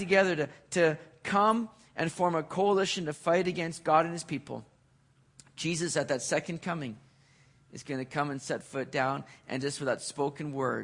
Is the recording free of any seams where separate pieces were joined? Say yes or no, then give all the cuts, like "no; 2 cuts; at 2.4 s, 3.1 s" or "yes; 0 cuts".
yes; 0 cuts